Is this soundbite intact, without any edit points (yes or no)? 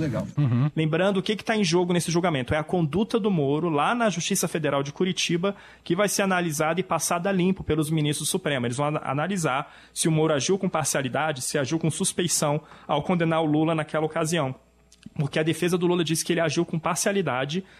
yes